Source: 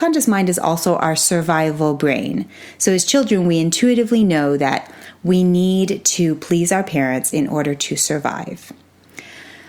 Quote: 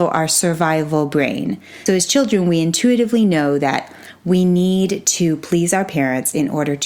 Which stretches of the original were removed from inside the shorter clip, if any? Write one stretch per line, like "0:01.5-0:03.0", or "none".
0:02.7-0:02.8